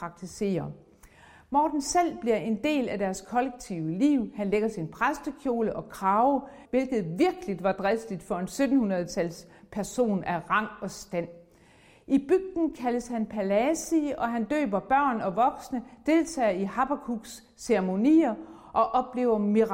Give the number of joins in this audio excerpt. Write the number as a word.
one